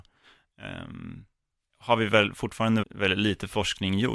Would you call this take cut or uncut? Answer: cut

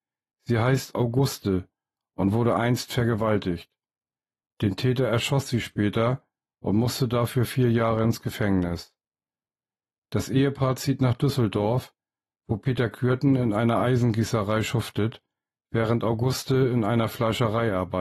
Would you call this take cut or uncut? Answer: uncut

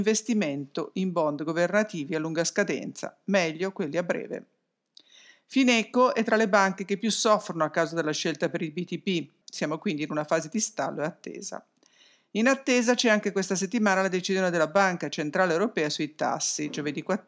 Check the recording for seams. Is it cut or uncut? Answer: cut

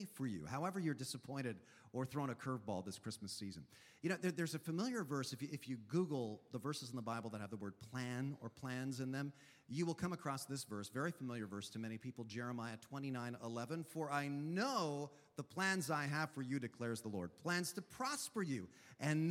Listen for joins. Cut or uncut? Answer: uncut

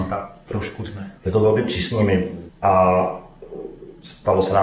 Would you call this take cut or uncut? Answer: cut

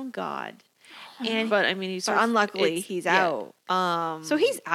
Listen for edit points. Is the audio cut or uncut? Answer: cut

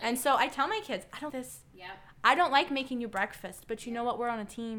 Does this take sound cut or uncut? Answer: cut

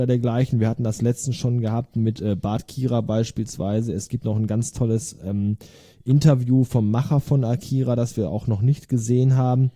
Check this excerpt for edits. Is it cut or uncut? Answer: uncut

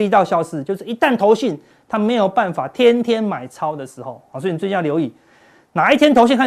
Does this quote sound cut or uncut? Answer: uncut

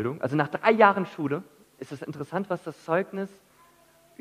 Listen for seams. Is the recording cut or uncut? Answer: uncut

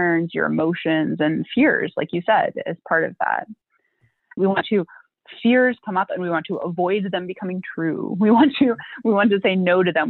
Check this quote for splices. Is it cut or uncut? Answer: cut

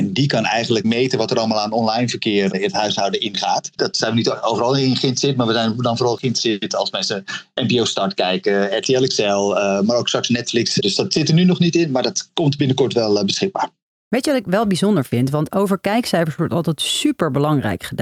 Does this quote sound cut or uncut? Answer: uncut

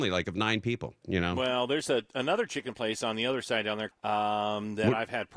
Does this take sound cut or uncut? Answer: cut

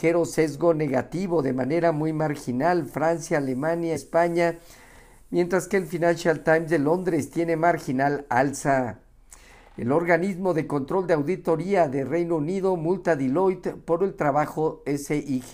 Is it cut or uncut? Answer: cut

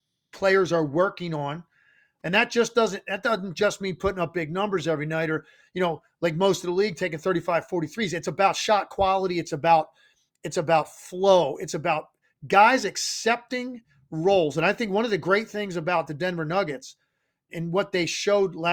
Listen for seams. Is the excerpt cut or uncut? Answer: cut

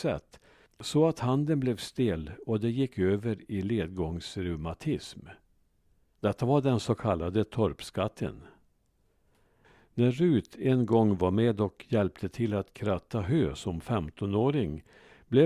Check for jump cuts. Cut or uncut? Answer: cut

